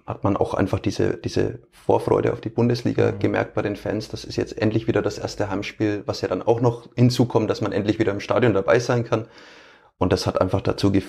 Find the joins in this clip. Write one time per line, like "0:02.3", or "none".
none